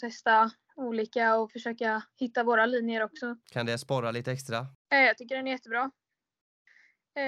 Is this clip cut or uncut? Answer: cut